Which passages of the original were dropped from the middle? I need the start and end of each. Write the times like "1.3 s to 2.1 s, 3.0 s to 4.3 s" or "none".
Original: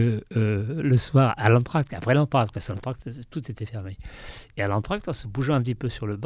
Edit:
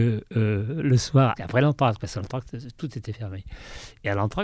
1.4 s to 1.9 s

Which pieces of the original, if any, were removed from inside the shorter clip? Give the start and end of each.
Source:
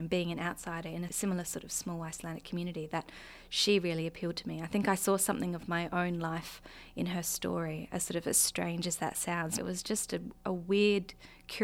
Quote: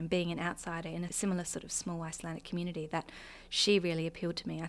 none

